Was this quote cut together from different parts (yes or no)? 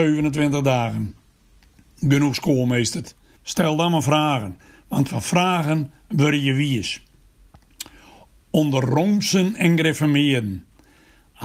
yes